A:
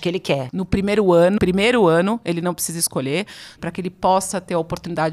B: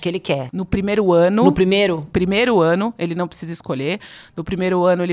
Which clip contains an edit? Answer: A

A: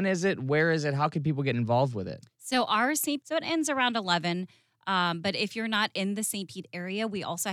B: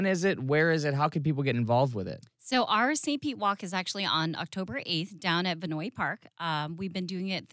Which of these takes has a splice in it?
A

